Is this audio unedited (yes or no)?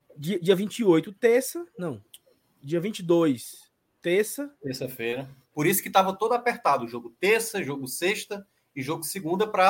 no